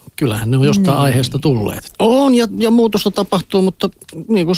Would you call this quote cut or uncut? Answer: cut